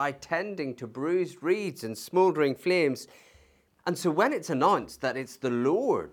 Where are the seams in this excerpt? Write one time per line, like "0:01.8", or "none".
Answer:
0:03.8